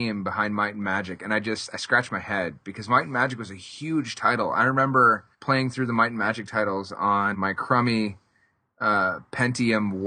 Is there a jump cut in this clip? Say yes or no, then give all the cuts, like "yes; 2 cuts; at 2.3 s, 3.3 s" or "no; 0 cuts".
yes; 2 cuts; at 5.3 s, 7.3 s